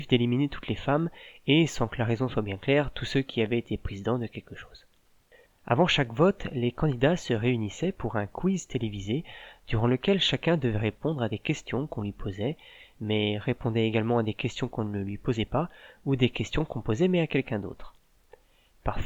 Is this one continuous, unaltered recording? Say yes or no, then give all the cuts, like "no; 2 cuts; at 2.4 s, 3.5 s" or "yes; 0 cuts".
no; 1 cut; at 5.5 s